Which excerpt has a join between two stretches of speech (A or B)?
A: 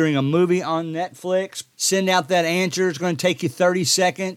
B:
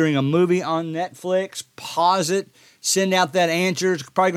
A